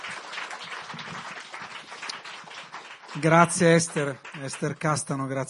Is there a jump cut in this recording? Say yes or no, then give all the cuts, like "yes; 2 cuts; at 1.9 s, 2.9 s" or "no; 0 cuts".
no; 0 cuts